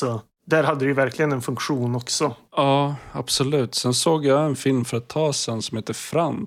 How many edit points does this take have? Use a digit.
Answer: 1